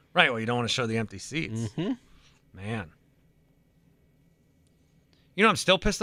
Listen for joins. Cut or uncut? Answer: uncut